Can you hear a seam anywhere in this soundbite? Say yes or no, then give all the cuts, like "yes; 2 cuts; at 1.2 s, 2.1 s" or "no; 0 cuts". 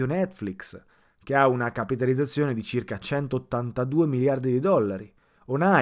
no; 0 cuts